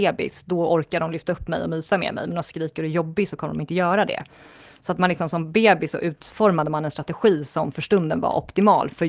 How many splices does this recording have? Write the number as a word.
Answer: zero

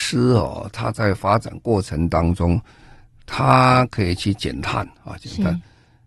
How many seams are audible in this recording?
zero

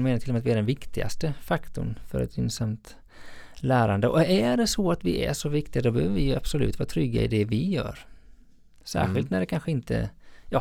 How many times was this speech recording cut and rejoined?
zero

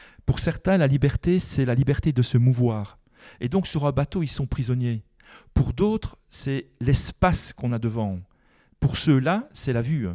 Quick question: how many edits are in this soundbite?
zero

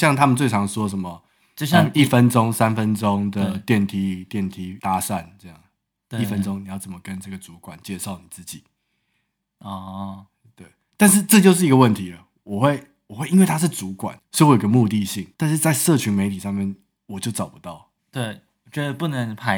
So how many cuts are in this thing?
three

